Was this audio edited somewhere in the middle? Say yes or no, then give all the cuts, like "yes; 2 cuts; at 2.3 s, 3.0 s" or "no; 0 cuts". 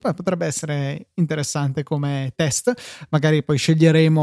no; 0 cuts